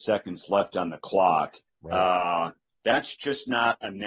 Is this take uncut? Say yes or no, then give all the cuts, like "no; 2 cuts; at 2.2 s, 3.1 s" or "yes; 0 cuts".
no; 1 cut; at 1.7 s